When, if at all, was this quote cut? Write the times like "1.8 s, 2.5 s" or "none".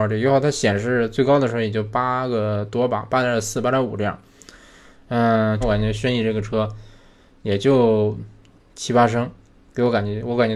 5.6 s

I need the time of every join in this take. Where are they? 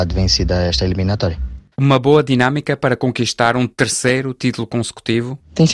1.7 s

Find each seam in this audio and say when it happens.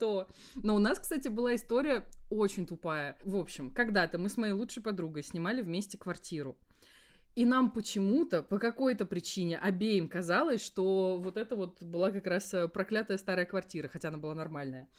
none

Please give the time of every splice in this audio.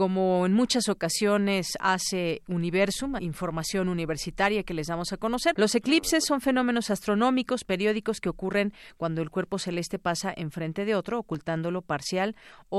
3.2 s, 5.5 s, 7.7 s

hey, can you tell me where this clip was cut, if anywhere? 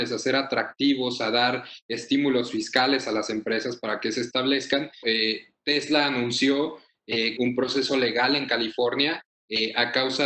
5.0 s, 7.4 s

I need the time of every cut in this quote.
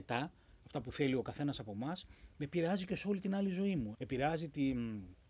3.9 s

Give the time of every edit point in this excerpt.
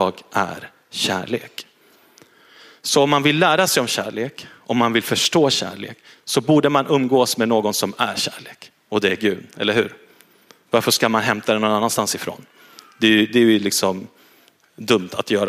none

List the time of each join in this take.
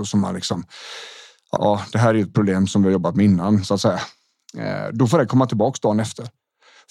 1.6 s

